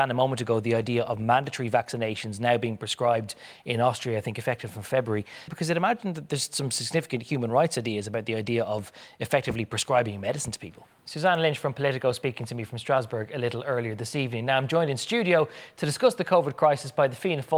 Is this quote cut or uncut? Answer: cut